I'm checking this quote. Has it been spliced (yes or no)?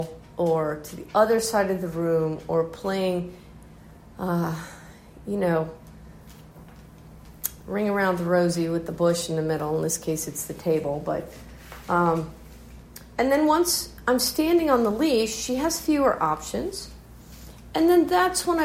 no